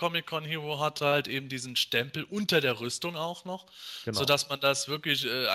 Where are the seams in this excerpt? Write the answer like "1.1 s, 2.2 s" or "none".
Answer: none